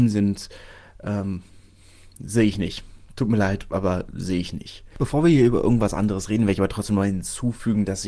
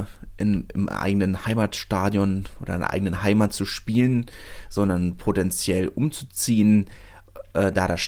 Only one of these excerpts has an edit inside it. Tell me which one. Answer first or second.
first